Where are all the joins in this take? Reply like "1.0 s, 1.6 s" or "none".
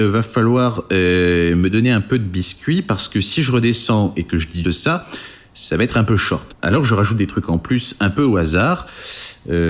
4.6 s, 6.5 s

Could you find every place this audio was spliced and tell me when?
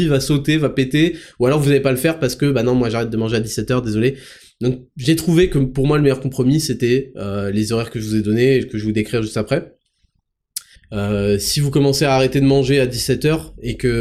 10.8 s

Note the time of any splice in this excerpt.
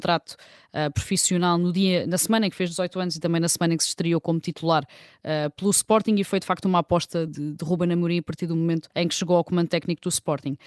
7.3 s, 8.9 s

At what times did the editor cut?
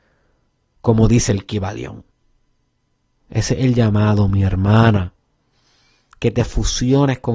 3.2 s

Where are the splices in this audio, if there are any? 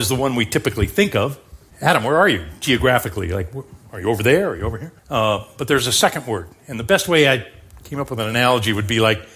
1.7 s, 5.0 s

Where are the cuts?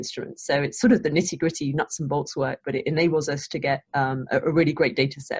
3.9 s

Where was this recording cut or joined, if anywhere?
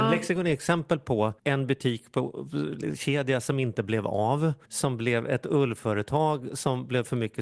1.4 s, 4.6 s

